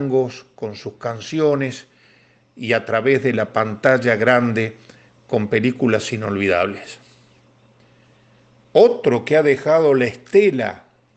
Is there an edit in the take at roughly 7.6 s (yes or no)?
no